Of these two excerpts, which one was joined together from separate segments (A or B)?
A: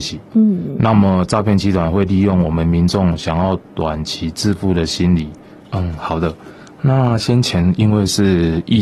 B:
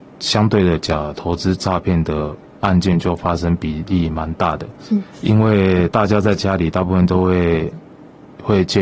A